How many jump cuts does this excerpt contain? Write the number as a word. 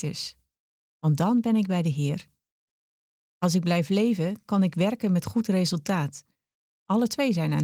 one